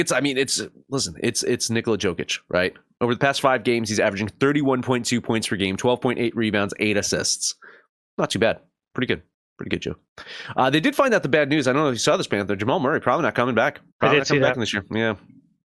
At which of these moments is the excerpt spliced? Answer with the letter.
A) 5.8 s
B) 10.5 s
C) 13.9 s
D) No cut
C